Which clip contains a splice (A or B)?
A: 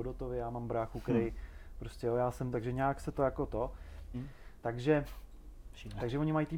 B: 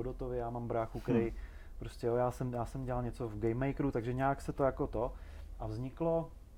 A